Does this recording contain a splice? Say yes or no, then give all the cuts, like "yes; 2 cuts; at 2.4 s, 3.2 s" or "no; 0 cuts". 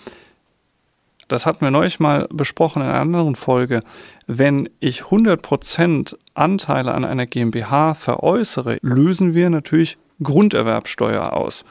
yes; 2 cuts; at 1.3 s, 8.8 s